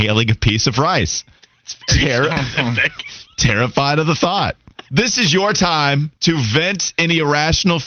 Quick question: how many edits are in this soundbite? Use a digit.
1